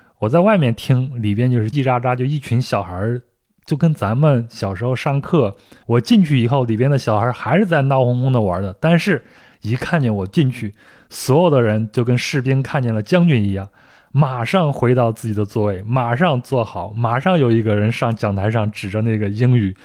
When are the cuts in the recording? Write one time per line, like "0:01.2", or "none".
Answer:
0:01.7
0:05.8